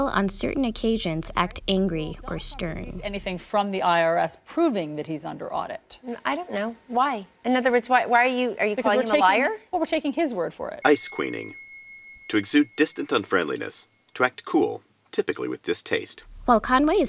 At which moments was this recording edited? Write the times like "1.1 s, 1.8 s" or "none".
10.8 s